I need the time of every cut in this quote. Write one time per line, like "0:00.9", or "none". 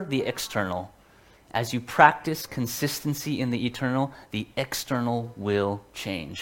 0:01.3

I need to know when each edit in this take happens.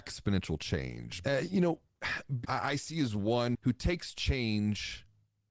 0:01.2
0:02.4

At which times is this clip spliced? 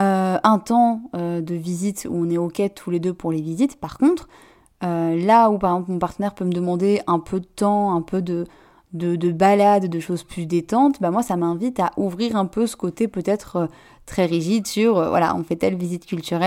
none

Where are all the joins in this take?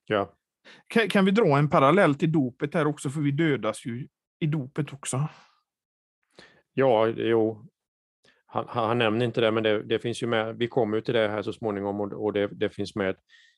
none

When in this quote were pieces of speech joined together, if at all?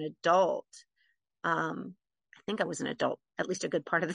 0:02.3

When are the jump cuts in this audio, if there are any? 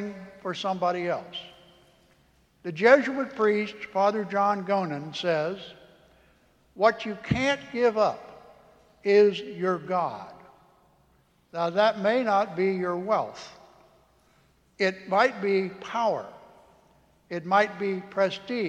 none

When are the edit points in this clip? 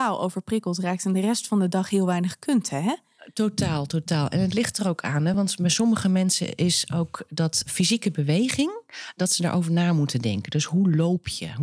none

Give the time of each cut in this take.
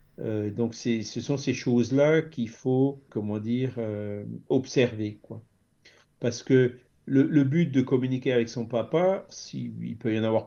0:03.1
0:09.3

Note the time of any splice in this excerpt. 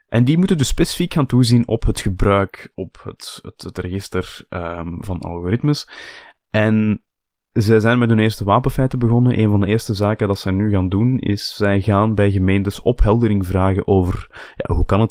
none

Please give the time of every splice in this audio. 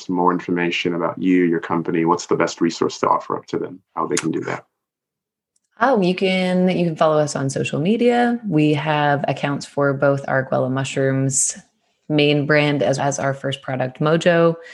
0:03.9
0:06.0
0:13.0

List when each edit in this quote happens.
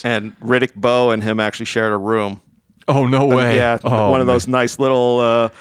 none

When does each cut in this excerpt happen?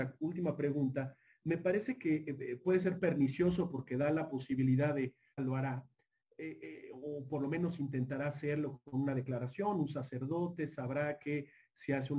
0:05.4

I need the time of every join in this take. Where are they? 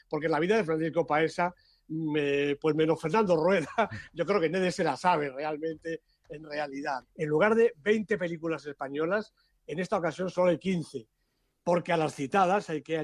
0:07.0

